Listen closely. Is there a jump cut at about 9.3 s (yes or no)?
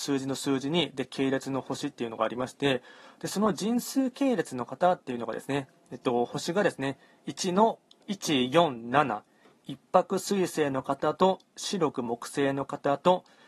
no